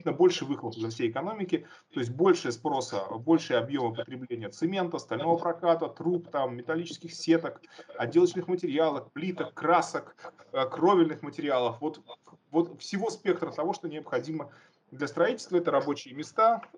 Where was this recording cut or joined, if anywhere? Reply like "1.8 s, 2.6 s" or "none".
none

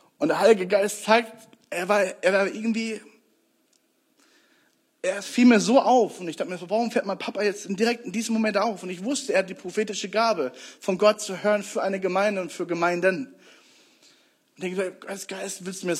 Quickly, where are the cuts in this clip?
none

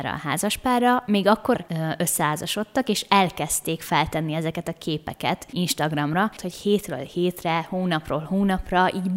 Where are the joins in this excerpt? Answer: 1.6 s, 6.4 s

